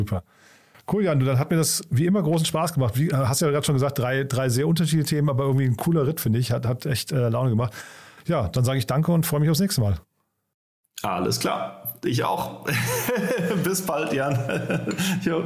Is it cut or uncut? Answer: uncut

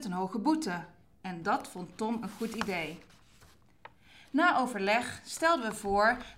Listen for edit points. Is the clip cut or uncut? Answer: cut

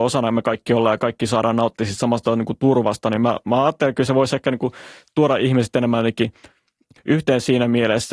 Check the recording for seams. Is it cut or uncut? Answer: uncut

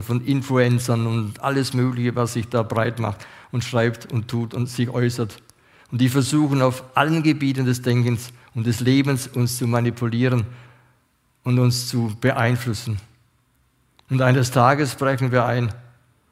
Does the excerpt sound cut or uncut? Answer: uncut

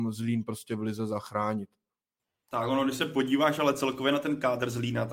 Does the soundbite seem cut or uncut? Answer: uncut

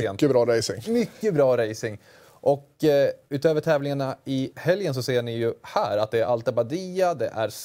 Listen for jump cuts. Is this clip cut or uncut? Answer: uncut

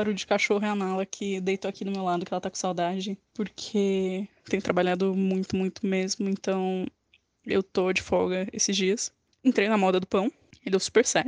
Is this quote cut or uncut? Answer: cut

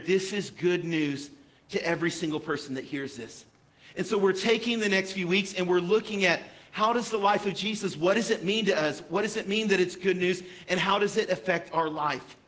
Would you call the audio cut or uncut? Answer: uncut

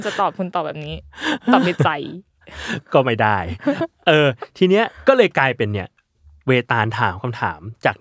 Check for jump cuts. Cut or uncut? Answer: uncut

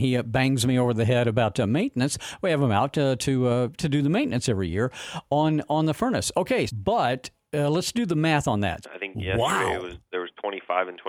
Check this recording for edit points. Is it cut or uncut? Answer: cut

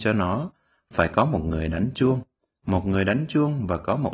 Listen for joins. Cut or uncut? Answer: uncut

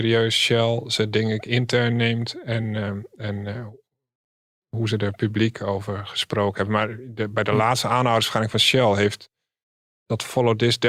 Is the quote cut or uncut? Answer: uncut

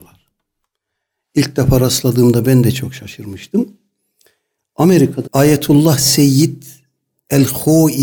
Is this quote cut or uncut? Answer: cut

